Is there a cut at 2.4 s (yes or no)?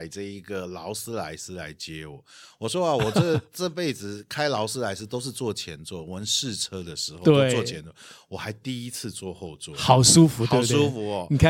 no